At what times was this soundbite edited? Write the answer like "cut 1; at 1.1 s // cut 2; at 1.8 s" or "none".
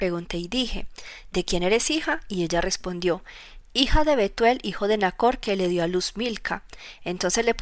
none